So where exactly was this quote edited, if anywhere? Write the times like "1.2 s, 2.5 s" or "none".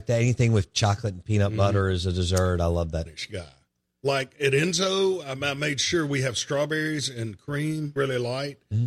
3.1 s, 8.0 s